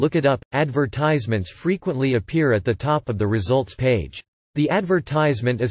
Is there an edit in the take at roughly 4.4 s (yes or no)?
yes